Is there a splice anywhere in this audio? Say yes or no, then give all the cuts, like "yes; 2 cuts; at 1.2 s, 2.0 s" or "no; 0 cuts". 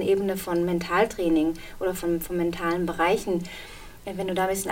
no; 0 cuts